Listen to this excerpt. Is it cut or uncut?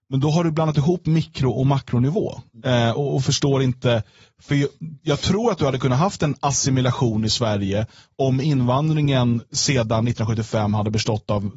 uncut